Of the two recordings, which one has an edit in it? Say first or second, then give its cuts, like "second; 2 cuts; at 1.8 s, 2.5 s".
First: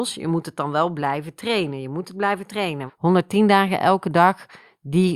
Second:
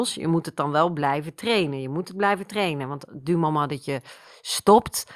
first; 1 cut; at 2.9 s